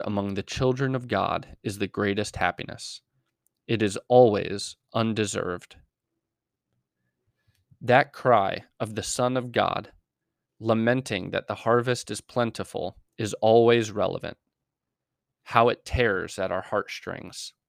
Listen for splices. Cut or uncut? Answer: cut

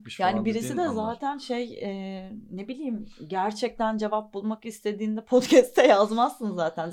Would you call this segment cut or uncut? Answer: uncut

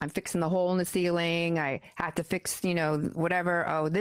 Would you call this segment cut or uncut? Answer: uncut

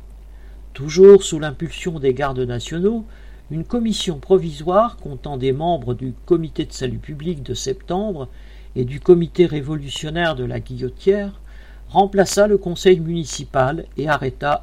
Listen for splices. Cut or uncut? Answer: uncut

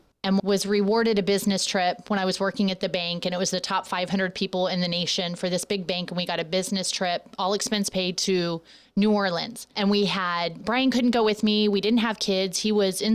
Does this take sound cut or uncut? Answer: cut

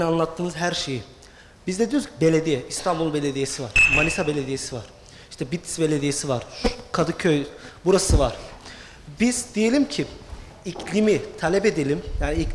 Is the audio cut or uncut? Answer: uncut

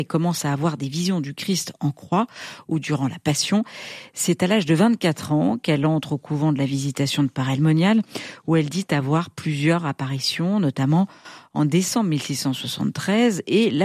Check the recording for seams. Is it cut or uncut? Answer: uncut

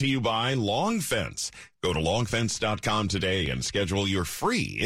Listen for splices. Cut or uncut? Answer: cut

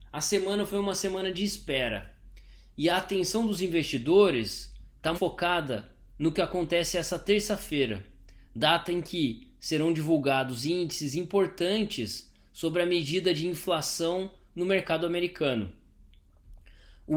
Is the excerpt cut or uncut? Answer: cut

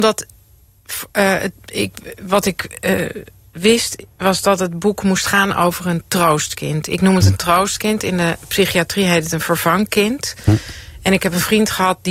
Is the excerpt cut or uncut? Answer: uncut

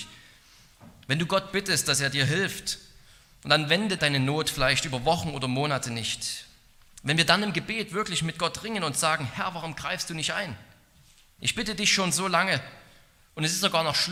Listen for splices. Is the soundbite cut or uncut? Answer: cut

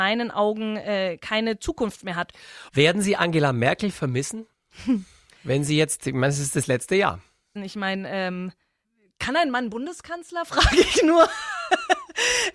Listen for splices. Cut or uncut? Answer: cut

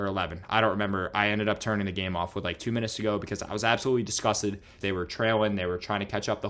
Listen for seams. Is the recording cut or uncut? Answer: cut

